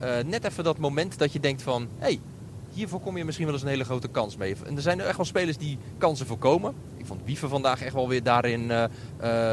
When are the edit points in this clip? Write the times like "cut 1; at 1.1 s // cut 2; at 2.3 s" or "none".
none